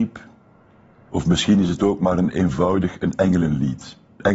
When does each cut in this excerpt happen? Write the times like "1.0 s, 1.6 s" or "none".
1.1 s